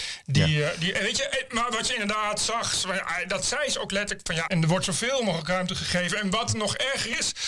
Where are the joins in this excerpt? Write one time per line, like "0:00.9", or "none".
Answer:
0:04.5